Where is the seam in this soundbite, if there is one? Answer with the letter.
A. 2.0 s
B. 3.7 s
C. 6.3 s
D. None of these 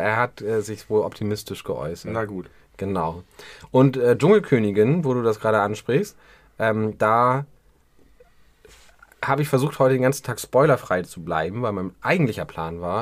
D